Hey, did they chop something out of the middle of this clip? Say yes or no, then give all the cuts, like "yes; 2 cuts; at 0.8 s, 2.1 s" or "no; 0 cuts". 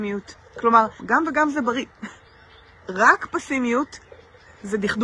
yes; 1 cut; at 1.0 s